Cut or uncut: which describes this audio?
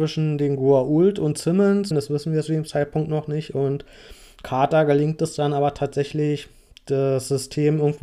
cut